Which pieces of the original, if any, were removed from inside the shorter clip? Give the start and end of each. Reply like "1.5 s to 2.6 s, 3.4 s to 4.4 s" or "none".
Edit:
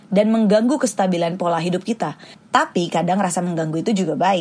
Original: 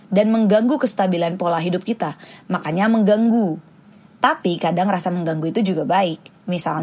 2.3 s to 4.0 s